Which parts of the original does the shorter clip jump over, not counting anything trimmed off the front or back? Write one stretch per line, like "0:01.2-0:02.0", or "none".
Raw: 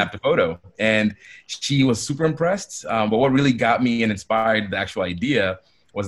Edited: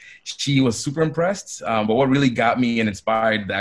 none